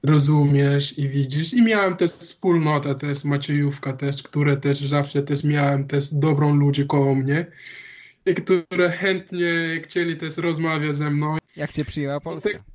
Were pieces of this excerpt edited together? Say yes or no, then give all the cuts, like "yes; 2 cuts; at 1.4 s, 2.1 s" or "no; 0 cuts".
yes; 1 cut; at 11.4 s